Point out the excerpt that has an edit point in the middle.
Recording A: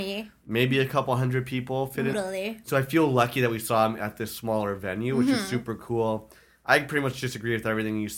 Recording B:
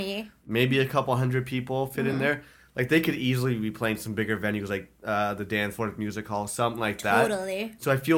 A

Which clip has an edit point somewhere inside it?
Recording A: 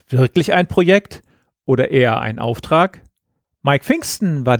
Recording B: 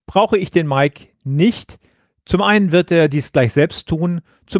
A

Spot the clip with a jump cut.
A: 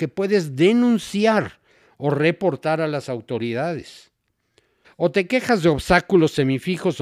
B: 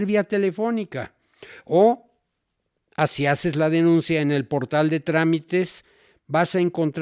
A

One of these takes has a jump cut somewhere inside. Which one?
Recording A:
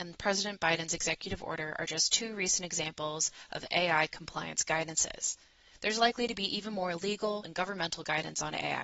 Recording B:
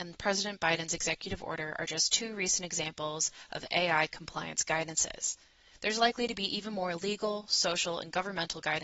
A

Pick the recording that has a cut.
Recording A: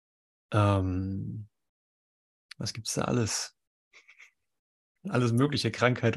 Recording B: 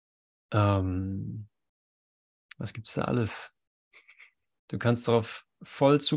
B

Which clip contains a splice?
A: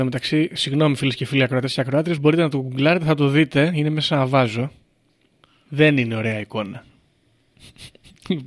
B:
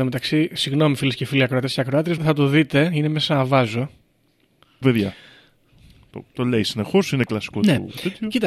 B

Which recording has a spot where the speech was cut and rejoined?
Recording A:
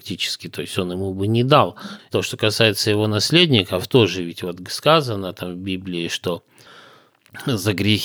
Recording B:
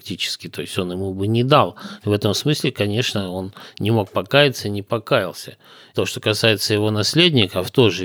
A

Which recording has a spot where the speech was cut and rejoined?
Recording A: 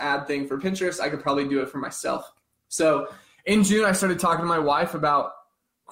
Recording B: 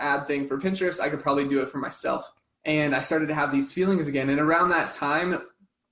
B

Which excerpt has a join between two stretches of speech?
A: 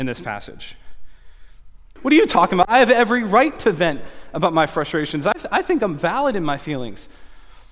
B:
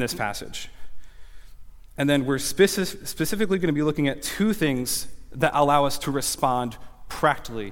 A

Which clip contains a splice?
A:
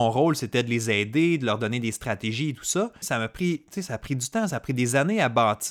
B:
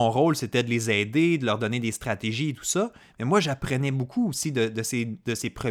A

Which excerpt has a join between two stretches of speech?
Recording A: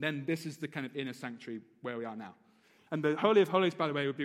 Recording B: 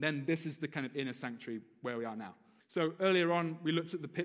B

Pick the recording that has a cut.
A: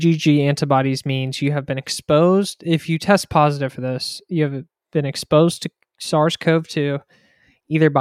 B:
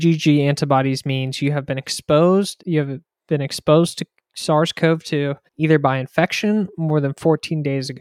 B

